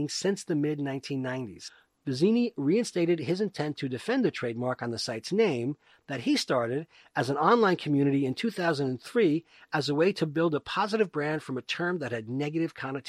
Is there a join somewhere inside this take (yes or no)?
no